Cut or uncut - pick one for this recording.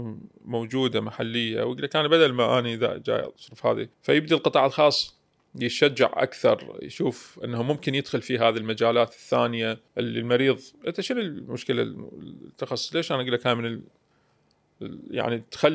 cut